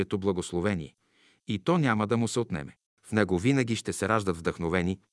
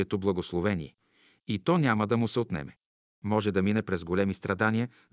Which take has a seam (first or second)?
first